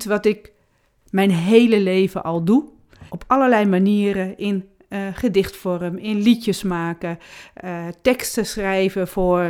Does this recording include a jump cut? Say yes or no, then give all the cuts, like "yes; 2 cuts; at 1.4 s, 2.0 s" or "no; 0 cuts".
yes; 1 cut; at 3.1 s